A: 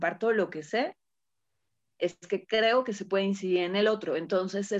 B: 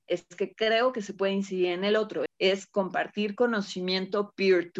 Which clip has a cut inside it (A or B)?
B